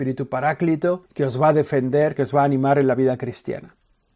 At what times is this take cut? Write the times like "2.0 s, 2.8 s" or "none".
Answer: 1.1 s, 2.2 s